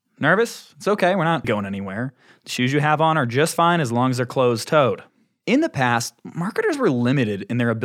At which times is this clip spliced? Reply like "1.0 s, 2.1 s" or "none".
1.4 s